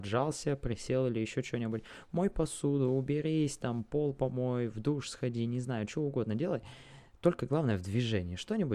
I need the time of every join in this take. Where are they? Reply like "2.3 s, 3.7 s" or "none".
none